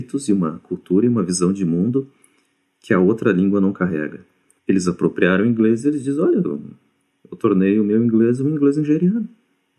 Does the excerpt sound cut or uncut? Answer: cut